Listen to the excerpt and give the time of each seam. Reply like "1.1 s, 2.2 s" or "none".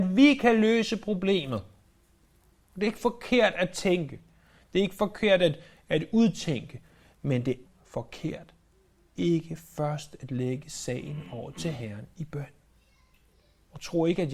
7.6 s